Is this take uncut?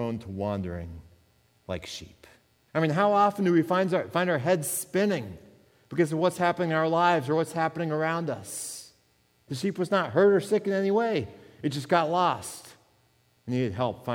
no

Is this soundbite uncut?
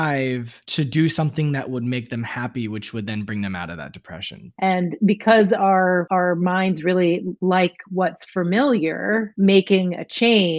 no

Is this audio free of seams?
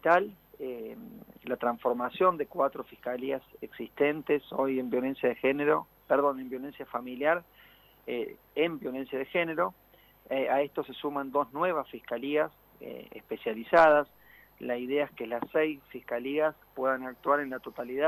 yes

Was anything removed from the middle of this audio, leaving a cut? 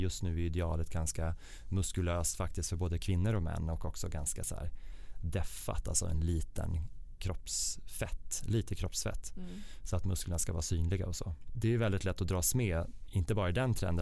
no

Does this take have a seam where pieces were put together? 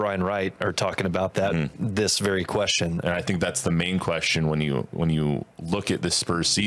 yes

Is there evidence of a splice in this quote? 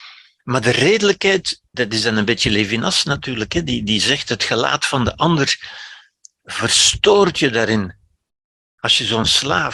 yes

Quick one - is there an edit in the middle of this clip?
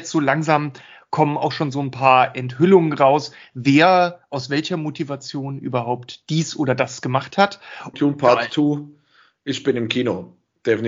yes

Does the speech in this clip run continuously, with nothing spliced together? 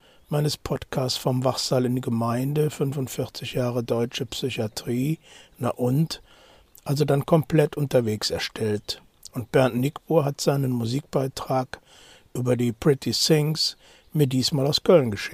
yes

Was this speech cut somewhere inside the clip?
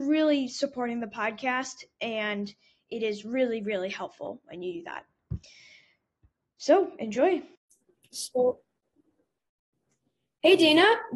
no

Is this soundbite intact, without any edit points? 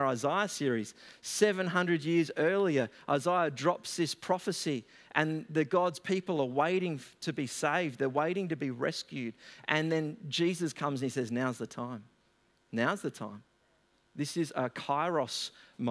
yes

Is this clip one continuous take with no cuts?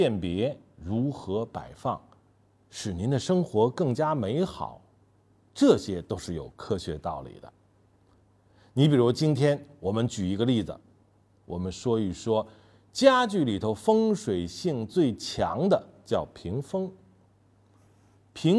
yes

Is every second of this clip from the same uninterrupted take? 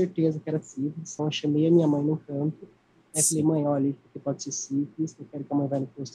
no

